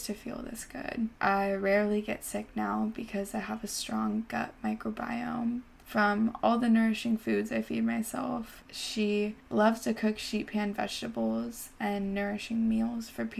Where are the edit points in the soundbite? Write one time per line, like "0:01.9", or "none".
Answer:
0:01.1
0:08.6